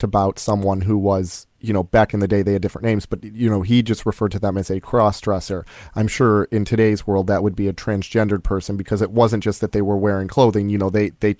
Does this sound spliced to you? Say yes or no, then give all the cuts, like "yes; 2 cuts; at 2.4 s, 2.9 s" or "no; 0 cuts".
no; 0 cuts